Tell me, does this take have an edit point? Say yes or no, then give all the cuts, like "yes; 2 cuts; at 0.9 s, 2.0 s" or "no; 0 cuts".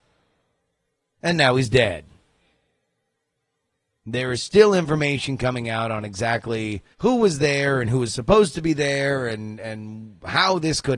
yes; 1 cut; at 6.9 s